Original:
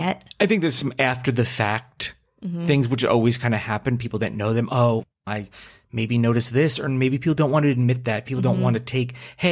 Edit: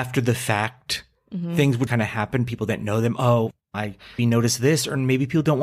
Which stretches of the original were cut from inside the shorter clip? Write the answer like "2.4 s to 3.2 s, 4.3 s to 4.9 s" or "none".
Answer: 3.0 s to 3.4 s, 5.7 s to 6.1 s